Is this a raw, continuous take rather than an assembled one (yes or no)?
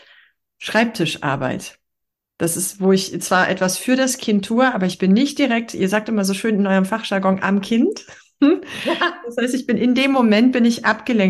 yes